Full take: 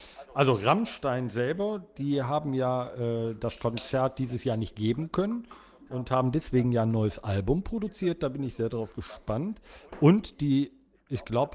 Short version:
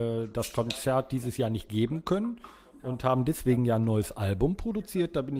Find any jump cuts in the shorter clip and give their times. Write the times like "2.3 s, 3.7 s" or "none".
none

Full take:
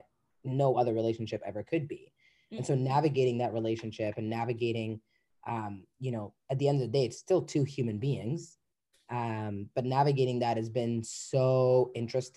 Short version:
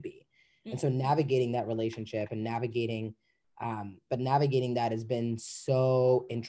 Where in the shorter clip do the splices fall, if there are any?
4.1 s

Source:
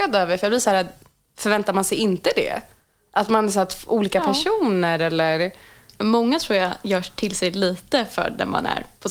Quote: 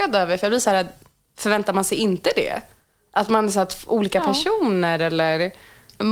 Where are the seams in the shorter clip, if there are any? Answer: none

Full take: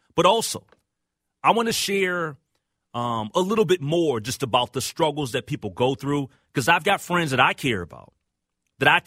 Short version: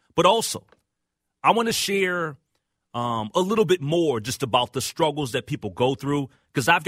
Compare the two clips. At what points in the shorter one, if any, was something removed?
none

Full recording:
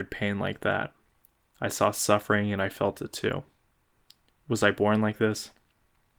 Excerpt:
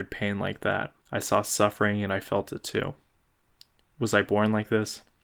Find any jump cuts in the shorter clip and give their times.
1.0 s

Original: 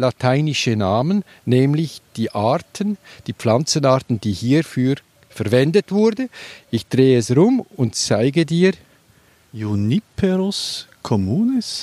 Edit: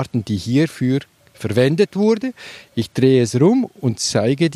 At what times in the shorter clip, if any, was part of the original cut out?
none

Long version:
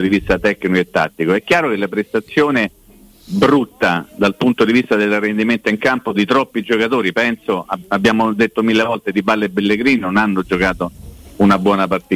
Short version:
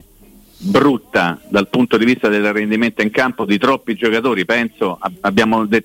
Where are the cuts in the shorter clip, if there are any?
none

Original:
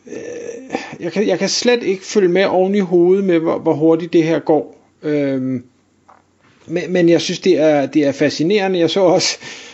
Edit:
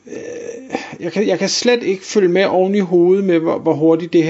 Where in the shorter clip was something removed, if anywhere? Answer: none

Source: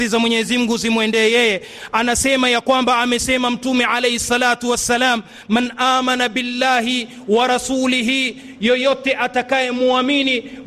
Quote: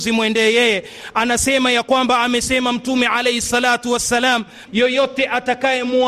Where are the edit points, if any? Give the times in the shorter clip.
4.7 s

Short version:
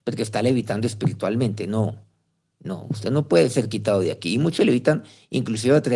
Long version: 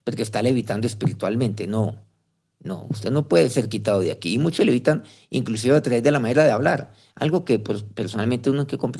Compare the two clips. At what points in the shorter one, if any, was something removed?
none

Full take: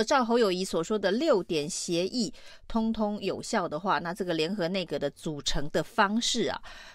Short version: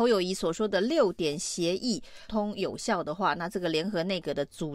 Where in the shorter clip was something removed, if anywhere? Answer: 2.3 s

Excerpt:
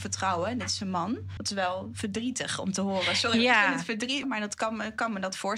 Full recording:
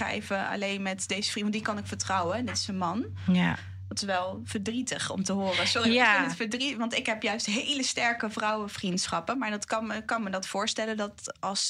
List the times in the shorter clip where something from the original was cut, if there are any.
1.4 s, 4.2 s

